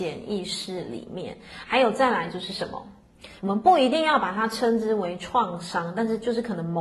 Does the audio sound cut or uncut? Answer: cut